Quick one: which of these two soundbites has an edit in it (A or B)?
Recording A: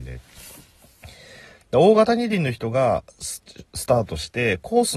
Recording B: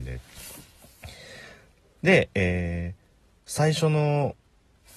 A